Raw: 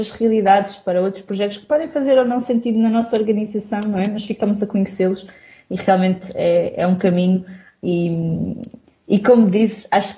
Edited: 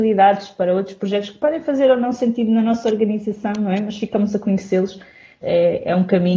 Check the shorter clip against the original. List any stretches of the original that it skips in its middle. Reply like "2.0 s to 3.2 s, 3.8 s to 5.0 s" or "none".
5.7 s to 6.3 s